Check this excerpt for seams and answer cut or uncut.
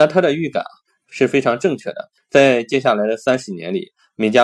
cut